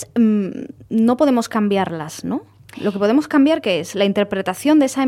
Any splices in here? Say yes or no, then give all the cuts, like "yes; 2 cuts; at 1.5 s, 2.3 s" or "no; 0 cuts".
no; 0 cuts